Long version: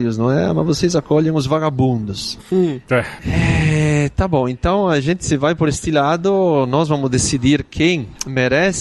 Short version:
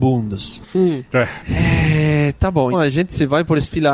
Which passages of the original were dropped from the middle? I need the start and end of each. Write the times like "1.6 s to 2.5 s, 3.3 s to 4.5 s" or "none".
4.5 s to 4.8 s